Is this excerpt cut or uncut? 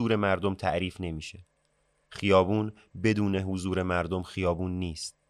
uncut